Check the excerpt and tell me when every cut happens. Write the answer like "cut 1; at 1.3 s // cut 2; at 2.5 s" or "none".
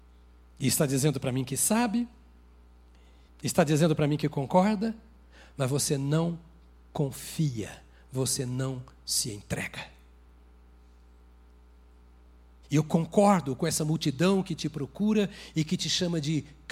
cut 1; at 3.3 s // cut 2; at 12.6 s